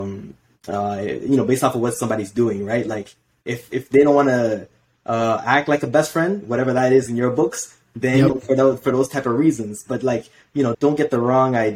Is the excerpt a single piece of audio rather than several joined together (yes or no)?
no